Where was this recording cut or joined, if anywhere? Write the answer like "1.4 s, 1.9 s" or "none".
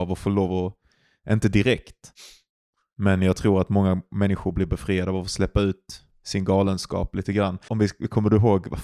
7.7 s